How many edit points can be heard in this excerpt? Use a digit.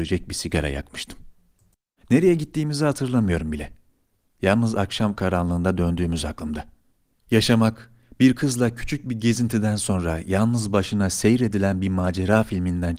2